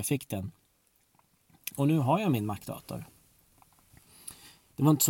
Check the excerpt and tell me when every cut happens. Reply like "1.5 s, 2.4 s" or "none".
1.7 s